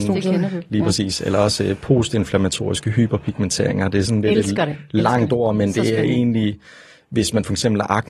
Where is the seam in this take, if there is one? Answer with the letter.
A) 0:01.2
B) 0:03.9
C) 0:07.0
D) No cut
D